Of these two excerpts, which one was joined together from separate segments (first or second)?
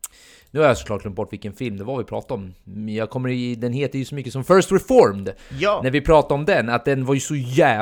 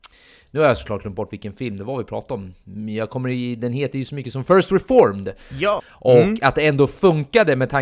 second